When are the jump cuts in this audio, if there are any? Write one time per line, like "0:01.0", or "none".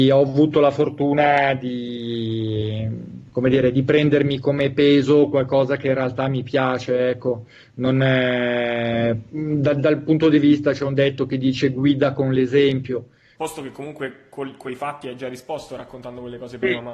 0:13.3

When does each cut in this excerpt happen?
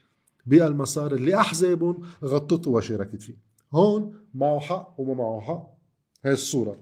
none

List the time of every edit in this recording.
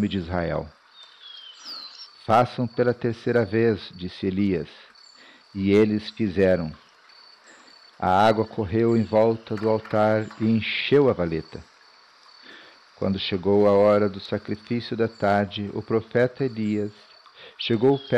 0:02.1

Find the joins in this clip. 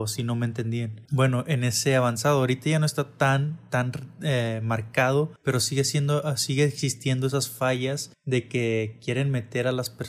0:01.0

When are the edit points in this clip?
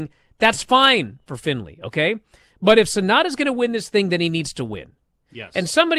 none

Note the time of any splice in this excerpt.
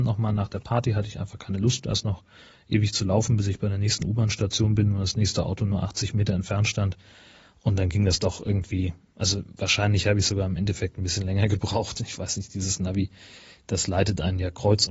none

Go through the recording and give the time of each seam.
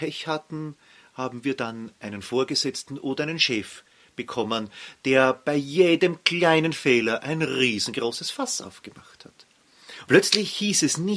0:10.0

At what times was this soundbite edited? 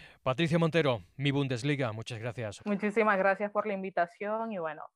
0:02.6

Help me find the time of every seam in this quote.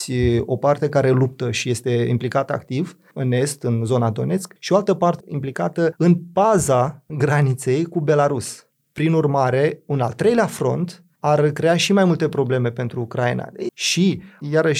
0:05.2
0:08.8
0:13.7

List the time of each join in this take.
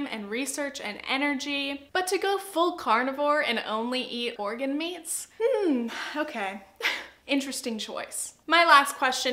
0:01.9
0:04.4

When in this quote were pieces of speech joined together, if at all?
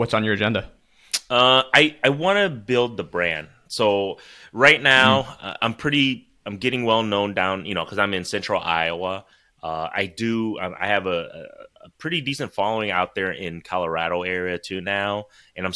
none

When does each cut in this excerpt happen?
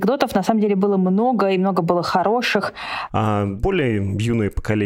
0:03.1

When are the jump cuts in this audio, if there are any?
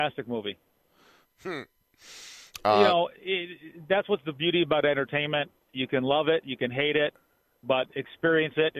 0:01.2

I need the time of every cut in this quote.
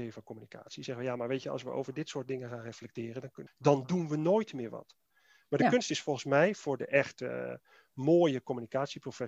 0:03.5

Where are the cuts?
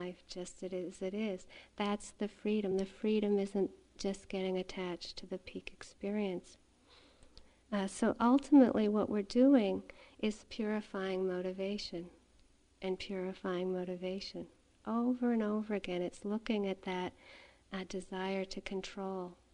none

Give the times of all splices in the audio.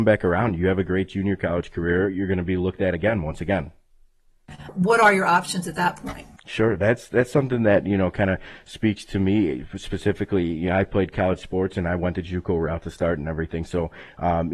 0:04.7

